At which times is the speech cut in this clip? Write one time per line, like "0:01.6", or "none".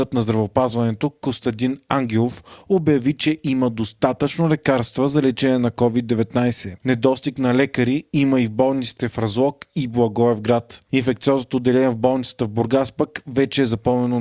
0:06.8